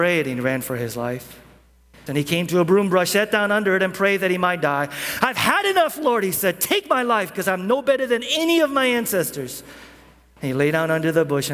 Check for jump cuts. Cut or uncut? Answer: cut